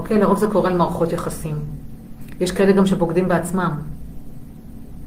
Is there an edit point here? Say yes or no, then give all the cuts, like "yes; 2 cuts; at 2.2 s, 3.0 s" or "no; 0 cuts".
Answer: no; 0 cuts